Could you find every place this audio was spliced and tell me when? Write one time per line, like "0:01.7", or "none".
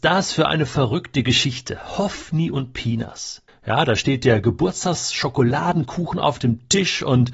0:03.5

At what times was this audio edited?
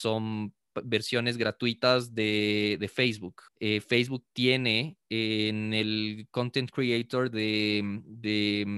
0:03.5

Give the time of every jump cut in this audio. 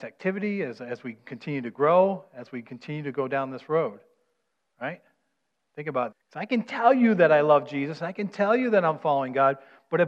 0:06.1

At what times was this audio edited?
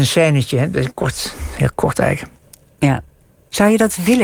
none

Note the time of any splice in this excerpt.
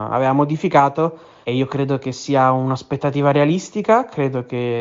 0:01.4

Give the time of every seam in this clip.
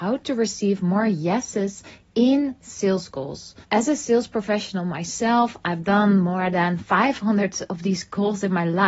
0:03.6

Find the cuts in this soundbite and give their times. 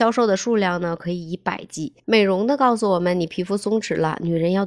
0:02.0

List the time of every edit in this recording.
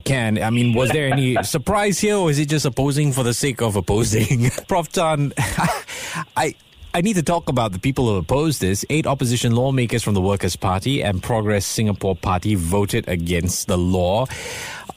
0:04.6

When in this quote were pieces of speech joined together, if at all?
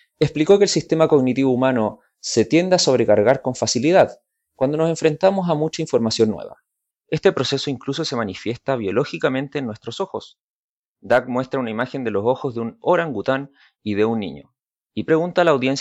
0:06.9

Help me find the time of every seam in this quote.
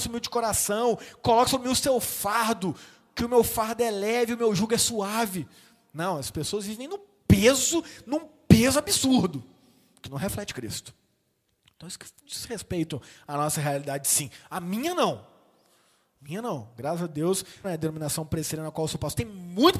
0:17.6

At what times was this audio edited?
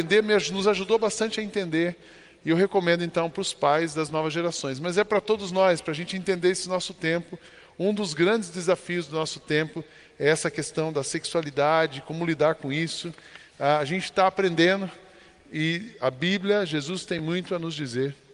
none

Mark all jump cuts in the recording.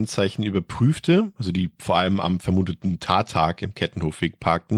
none

